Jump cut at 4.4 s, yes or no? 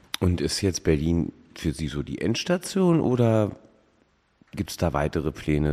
no